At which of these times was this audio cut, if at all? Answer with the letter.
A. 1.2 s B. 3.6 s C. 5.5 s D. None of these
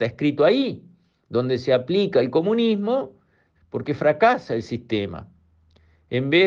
B